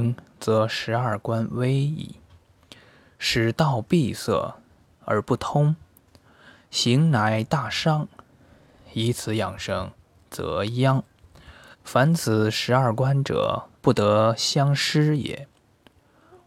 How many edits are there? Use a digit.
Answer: 2